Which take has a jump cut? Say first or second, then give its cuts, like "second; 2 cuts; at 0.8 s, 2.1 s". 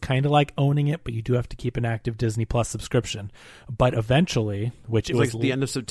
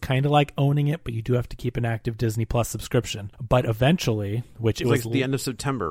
second; 1 cut; at 3.3 s